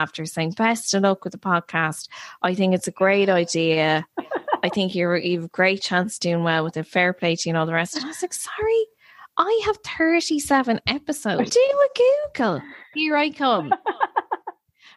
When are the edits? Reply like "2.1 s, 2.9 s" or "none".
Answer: 11.5 s, 12.9 s